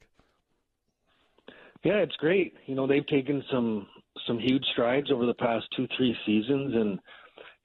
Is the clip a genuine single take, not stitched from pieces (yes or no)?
yes